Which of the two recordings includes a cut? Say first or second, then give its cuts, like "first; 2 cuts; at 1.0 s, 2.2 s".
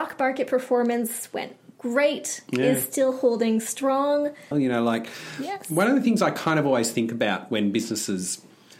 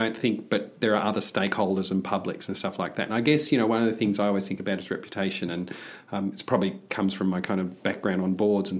first; 1 cut; at 4.5 s